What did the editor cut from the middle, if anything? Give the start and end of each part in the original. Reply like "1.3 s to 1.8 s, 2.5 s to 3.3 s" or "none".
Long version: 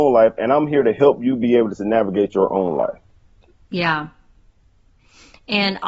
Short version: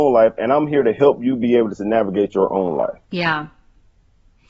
3.0 s to 3.6 s